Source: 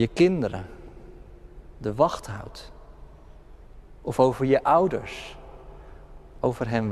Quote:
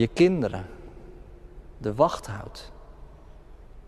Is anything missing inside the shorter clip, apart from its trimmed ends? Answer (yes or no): no